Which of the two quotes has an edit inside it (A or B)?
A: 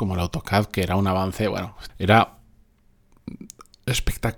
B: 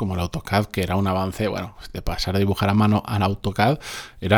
A